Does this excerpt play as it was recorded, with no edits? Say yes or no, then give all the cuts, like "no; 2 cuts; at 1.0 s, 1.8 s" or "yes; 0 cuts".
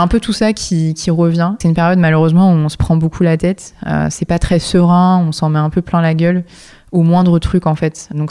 no; 1 cut; at 1.6 s